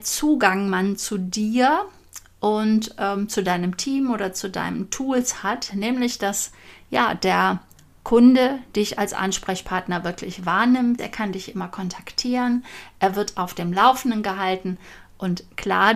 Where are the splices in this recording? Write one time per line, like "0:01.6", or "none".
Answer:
0:11.0